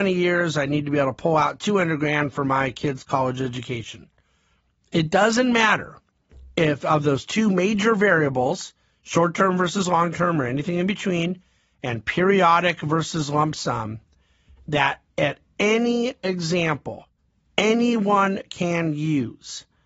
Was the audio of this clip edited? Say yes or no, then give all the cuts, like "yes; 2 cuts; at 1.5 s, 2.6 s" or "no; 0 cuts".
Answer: no; 0 cuts